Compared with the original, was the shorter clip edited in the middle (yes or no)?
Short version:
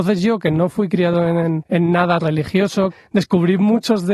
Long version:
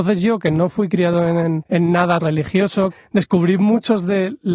no